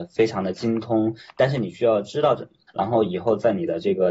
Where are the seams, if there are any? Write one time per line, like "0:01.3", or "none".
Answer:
0:02.7